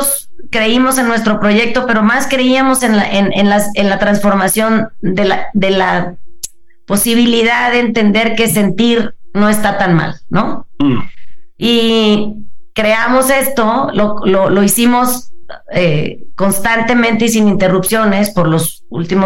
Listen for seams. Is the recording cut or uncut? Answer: uncut